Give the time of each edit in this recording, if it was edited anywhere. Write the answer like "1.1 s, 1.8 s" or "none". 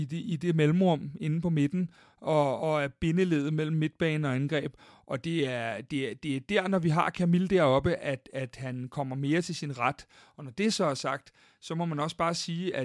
none